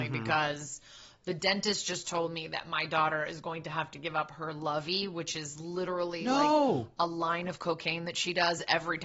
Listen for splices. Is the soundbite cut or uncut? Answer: uncut